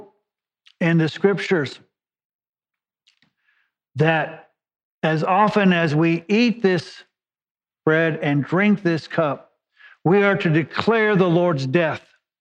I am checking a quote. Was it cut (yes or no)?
no